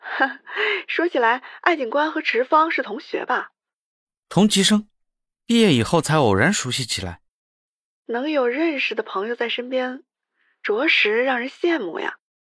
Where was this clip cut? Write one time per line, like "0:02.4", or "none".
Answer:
none